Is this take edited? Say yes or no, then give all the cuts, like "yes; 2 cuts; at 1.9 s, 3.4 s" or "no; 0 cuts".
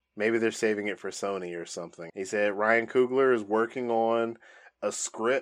yes; 1 cut; at 2.1 s